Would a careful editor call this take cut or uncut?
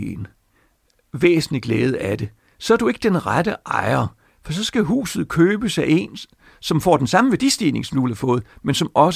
uncut